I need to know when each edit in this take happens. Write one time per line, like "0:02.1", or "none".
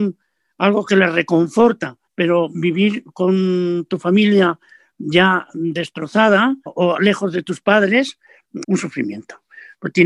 0:02.1
0:06.7
0:08.6